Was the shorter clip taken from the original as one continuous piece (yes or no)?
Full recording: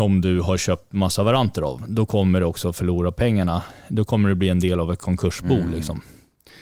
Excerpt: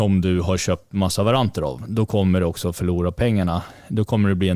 yes